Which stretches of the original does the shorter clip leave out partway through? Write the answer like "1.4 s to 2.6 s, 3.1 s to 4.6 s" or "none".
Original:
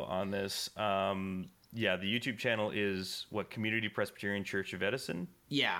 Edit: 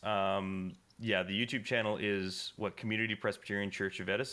none